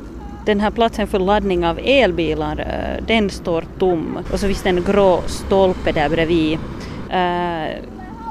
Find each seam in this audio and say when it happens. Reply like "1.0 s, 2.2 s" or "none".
4.2 s, 7.1 s